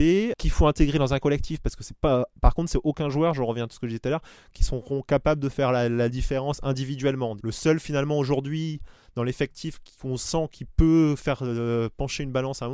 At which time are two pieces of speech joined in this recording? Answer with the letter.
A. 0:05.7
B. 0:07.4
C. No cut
B